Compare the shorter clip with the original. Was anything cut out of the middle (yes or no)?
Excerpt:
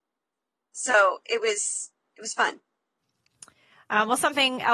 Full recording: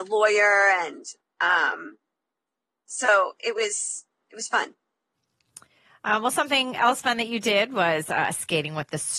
no